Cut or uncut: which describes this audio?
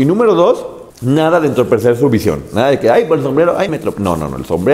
cut